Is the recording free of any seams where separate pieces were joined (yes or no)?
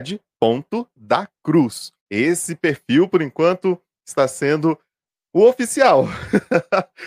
no